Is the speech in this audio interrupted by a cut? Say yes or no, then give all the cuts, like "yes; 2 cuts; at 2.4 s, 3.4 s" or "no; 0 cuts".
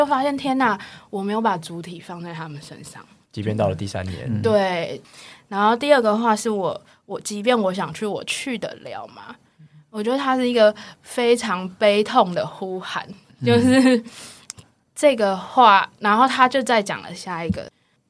yes; 1 cut; at 14.6 s